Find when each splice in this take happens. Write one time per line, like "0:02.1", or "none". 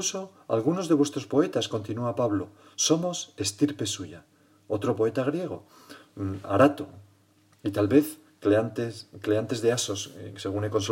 none